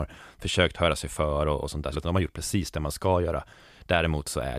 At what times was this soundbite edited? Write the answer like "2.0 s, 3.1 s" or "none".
1.9 s